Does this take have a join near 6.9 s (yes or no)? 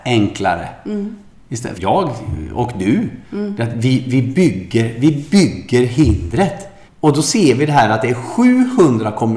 yes